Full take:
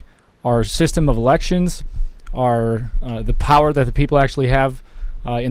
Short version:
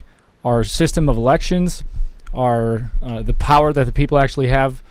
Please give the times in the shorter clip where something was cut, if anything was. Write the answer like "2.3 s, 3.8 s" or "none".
none